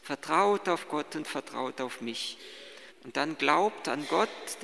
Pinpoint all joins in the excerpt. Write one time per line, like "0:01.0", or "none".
0:02.9